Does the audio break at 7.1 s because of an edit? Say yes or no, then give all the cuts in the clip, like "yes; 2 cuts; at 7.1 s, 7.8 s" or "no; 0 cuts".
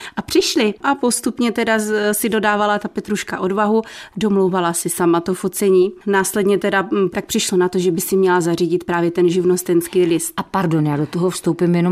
yes; 1 cut; at 7.1 s